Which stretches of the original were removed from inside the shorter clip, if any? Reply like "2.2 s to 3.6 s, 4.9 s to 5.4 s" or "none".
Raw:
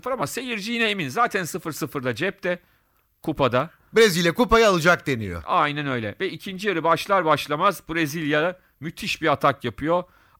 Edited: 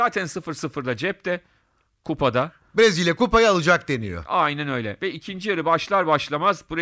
none